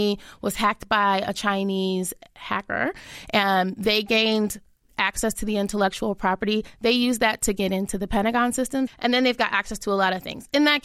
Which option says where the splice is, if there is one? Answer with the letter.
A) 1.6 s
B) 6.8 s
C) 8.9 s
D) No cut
C